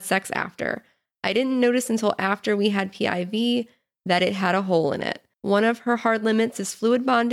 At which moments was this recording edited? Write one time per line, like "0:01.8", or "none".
0:05.3